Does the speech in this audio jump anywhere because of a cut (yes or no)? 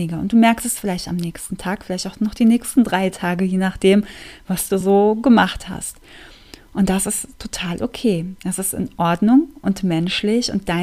no